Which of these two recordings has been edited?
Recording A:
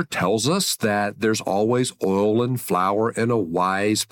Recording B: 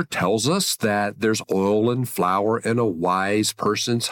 B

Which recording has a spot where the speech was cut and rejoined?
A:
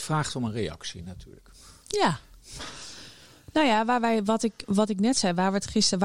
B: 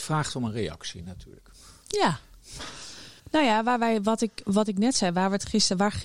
B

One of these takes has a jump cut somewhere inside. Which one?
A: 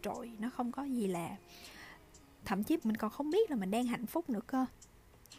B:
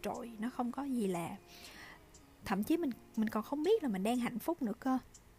A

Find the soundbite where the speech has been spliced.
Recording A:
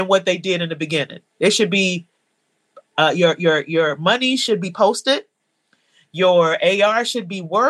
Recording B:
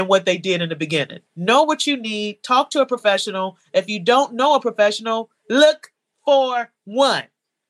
B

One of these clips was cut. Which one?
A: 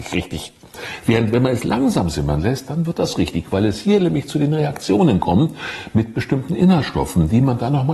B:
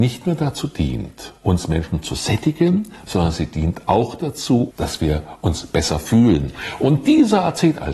B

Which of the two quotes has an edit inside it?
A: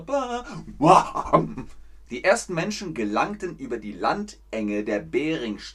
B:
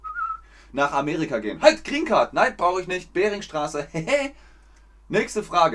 A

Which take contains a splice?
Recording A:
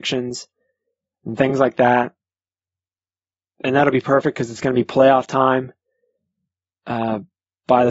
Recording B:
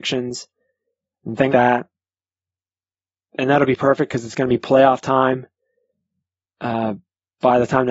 B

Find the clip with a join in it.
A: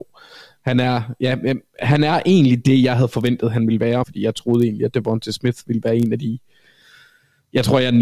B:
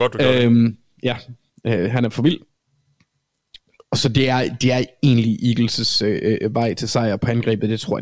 A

